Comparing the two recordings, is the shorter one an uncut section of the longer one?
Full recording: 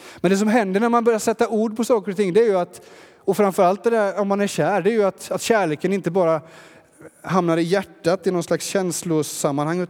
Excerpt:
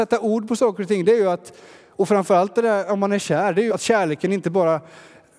no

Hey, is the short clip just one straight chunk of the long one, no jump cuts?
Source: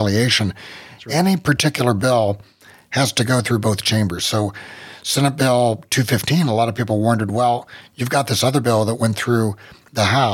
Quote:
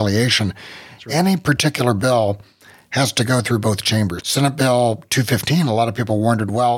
no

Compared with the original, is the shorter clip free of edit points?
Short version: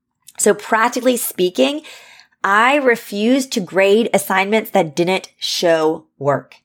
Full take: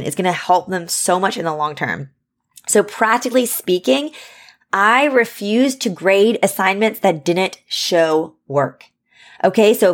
yes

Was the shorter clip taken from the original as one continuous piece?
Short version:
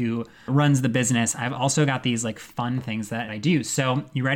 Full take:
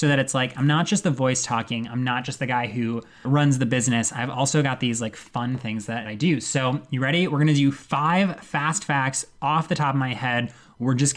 yes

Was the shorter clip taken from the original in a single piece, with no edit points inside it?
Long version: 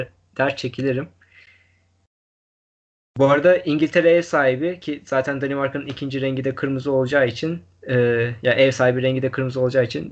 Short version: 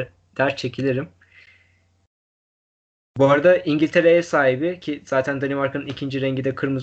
yes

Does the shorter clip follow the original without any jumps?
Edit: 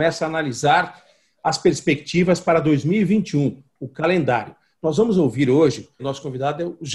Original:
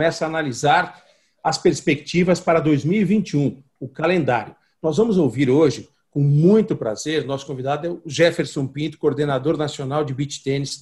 no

